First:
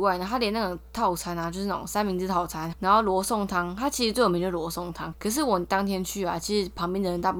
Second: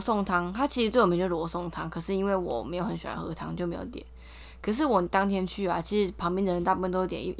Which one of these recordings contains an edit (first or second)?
first